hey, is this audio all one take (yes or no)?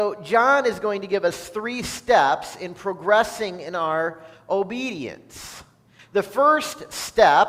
no